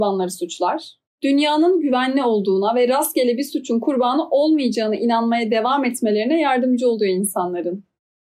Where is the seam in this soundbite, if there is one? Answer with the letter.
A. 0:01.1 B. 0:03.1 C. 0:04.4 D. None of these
A